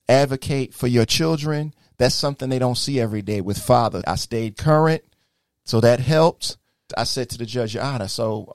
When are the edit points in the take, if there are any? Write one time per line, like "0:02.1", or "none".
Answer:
0:04.0
0:06.9